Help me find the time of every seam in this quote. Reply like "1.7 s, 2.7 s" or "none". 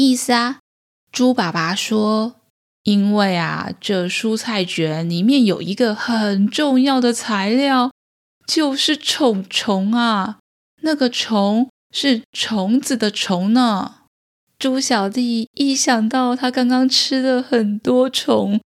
10.7 s